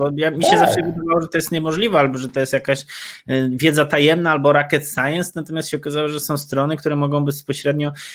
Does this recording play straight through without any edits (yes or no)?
yes